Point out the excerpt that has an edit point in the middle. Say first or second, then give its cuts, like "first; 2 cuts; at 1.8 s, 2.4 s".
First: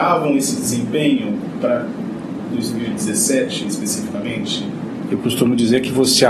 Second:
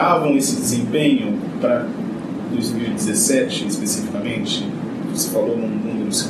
first; 1 cut; at 5.1 s